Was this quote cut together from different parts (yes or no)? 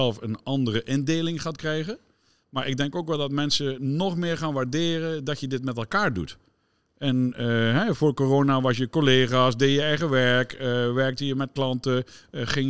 no